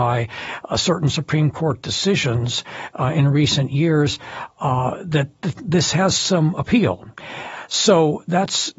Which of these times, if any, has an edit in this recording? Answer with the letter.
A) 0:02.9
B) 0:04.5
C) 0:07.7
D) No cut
D